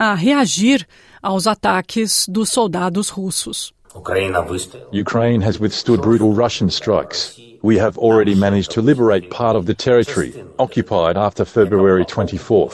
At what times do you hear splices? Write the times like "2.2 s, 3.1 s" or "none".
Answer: 3.8 s